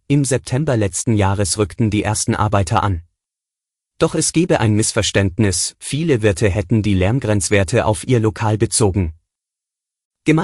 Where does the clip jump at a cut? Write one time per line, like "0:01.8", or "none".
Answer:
0:03.9